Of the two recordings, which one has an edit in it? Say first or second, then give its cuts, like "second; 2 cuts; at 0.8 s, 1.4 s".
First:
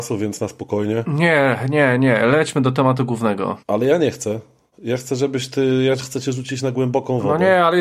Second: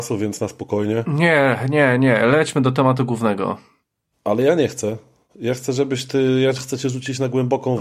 first; 1 cut; at 3.6 s